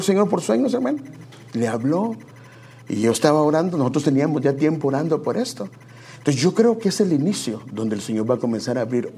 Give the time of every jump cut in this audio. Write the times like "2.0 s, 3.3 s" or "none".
none